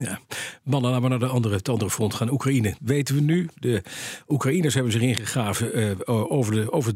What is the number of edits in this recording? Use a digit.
1